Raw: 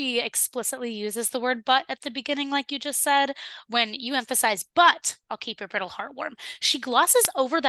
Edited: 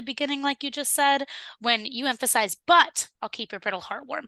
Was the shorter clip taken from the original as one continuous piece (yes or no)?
yes